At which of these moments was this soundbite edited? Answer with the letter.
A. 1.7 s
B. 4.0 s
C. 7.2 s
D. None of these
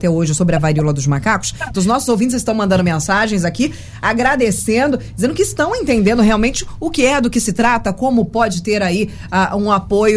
A